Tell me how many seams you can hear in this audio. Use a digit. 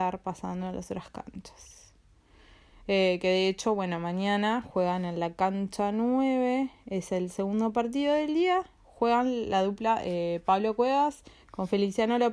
0